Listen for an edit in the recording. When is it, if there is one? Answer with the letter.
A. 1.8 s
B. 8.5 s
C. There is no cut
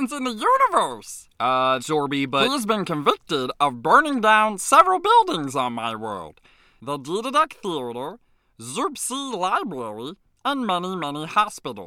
A